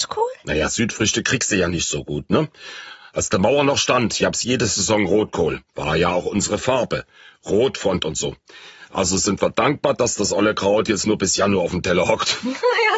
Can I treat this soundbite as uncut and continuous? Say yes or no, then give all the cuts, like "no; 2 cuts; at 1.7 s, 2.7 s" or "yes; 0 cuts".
yes; 0 cuts